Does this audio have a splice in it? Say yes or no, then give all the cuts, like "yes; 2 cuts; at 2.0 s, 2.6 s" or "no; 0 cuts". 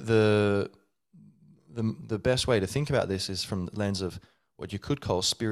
no; 0 cuts